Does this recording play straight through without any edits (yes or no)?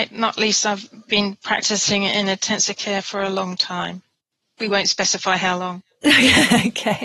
yes